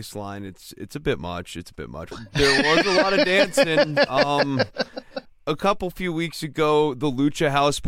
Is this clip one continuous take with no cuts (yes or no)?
no